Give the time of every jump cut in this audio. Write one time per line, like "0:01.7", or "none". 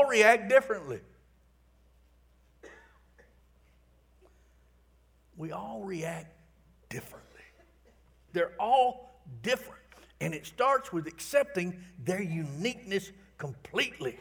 0:03.4
0:08.3